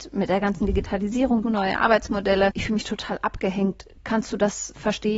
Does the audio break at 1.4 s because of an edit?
yes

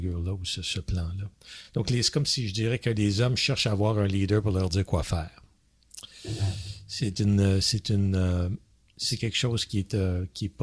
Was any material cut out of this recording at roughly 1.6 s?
no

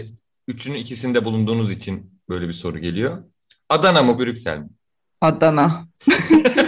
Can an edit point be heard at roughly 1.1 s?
no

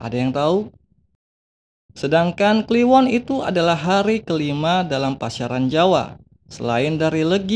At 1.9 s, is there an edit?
yes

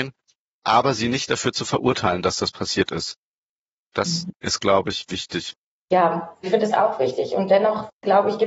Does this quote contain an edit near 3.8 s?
no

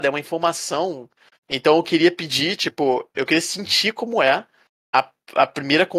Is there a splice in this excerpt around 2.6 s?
no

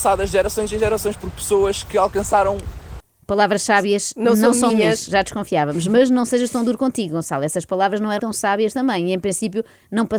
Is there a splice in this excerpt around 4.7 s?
yes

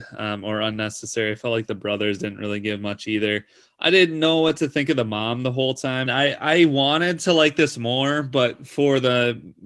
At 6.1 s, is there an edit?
yes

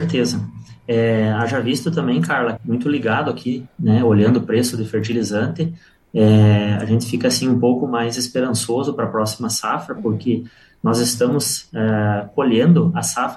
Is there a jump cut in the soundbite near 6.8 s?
no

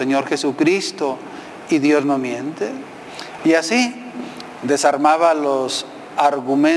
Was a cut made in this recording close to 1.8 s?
no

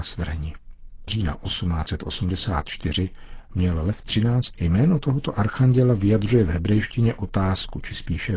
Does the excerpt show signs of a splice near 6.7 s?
no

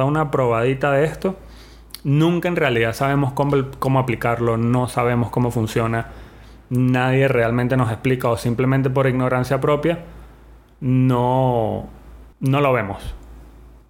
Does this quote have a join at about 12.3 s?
yes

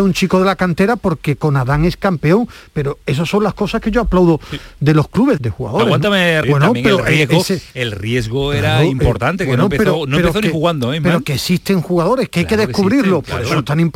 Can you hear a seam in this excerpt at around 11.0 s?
no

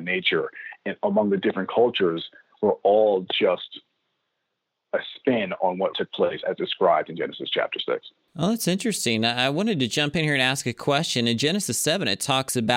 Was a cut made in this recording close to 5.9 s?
yes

